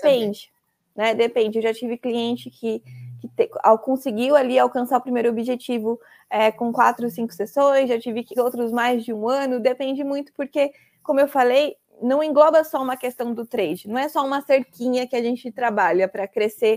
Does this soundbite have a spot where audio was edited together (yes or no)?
yes